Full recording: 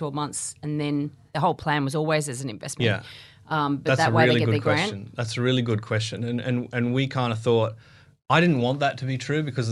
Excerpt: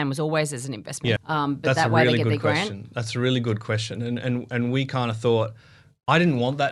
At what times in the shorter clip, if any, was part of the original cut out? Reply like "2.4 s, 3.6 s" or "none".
1.2 s